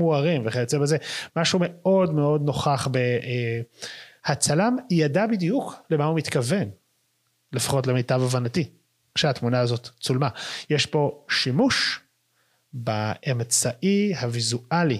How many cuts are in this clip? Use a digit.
1